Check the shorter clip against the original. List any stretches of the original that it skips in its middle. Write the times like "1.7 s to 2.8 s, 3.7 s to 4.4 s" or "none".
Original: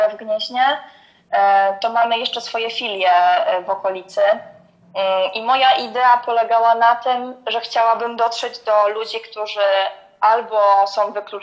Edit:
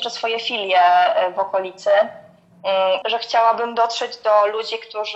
5.3 s to 7.4 s